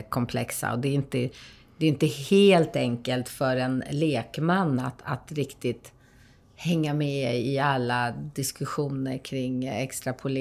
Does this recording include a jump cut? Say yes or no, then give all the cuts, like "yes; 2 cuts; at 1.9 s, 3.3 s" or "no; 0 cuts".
no; 0 cuts